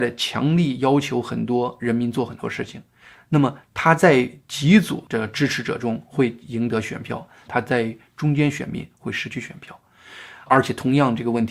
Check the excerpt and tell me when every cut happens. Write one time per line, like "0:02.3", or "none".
0:07.5